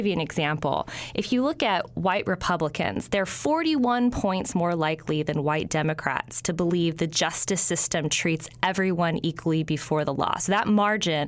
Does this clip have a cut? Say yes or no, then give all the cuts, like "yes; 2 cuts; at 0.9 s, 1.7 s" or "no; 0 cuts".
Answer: no; 0 cuts